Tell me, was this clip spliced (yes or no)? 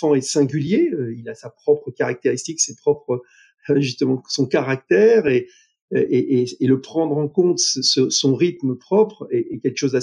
no